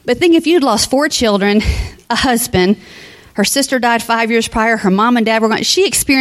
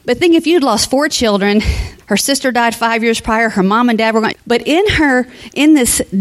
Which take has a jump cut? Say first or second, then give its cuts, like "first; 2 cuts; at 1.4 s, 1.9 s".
second; 2 cuts; at 2.0 s, 4.3 s